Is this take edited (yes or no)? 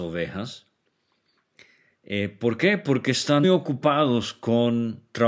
yes